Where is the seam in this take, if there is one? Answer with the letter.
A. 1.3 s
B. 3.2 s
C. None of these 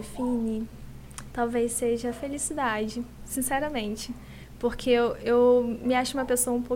A